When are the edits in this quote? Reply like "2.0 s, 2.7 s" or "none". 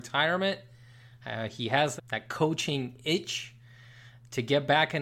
2.0 s